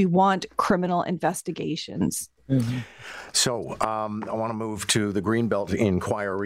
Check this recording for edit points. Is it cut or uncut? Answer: cut